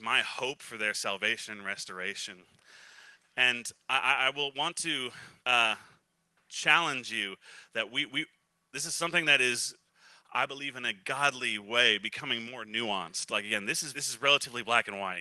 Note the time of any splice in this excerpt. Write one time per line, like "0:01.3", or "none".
0:05.4
0:13.9